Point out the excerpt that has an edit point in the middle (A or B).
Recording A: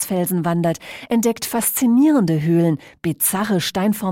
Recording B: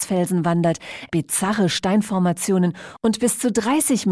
B